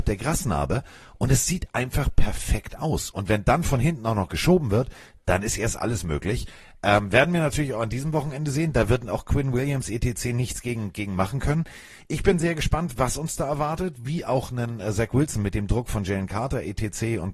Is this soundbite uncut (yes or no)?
no